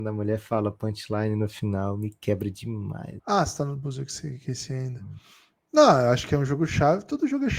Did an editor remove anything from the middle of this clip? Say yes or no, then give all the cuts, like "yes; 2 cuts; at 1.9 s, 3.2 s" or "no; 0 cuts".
yes; 1 cut; at 3.2 s